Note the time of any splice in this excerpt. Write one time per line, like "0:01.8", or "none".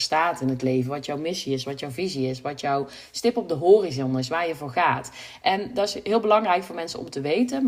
none